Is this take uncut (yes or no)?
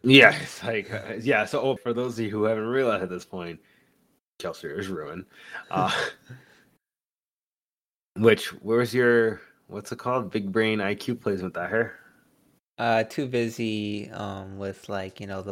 no